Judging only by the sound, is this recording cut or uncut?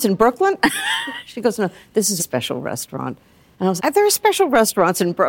cut